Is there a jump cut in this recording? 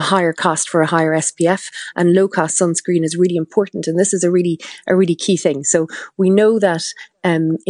no; 0 cuts

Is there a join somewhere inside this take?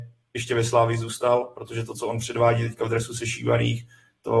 no; 0 cuts

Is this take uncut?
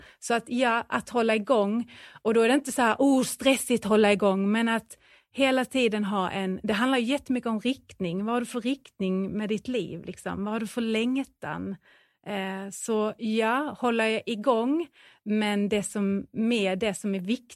yes; 0 cuts

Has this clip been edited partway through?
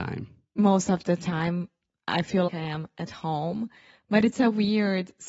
yes; 1 cut; at 2.5 s

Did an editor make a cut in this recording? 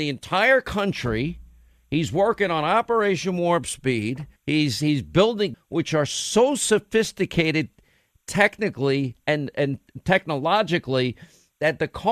yes; 2 cuts; at 4.4 s, 5.5 s

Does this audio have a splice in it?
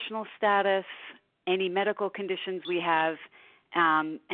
no; 0 cuts

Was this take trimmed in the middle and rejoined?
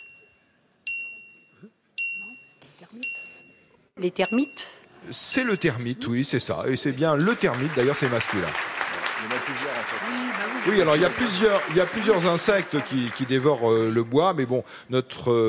no; 0 cuts

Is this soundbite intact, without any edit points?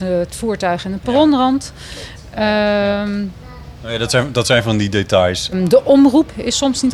no; 1 cut; at 5.5 s

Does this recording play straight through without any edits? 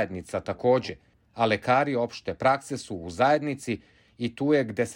no; 1 cut; at 1.1 s

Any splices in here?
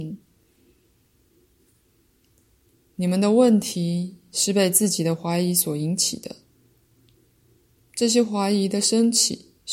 no; 0 cuts

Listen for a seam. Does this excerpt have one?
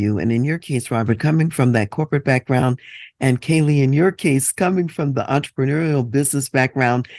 no; 0 cuts

